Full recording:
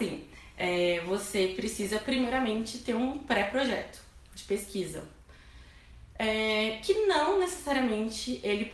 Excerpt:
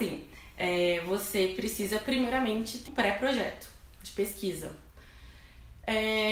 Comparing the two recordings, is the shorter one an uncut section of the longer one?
no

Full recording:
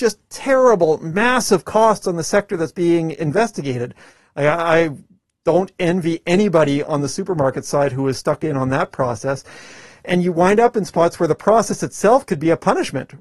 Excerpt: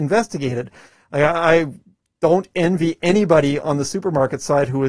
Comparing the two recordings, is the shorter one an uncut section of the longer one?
yes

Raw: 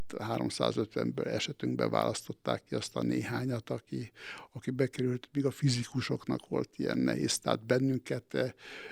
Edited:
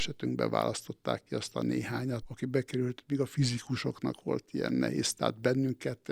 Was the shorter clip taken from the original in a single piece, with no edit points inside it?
no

